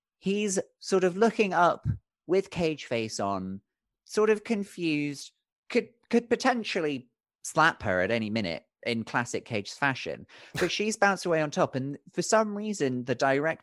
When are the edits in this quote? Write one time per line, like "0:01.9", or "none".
0:05.5